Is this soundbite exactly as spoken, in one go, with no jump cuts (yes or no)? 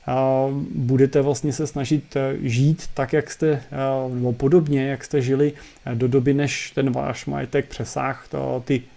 yes